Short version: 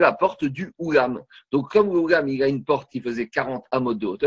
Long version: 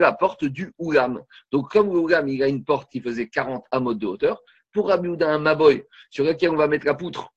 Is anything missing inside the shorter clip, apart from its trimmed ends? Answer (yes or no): no